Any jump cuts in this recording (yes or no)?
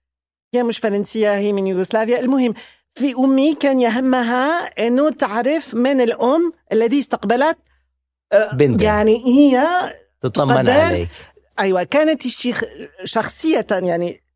yes